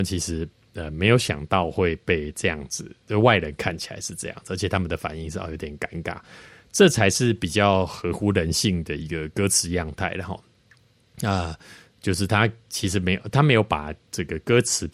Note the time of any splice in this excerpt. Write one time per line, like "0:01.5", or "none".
none